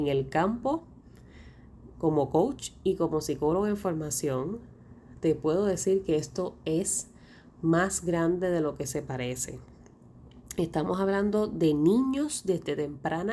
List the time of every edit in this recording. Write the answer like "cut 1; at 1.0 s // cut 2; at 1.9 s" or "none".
none